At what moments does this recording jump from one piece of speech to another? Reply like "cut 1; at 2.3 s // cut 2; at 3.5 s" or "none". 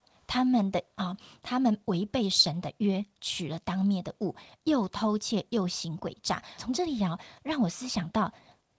cut 1; at 6.6 s